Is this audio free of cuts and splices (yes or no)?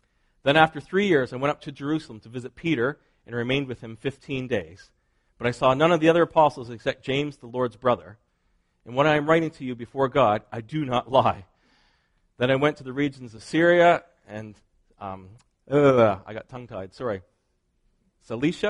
yes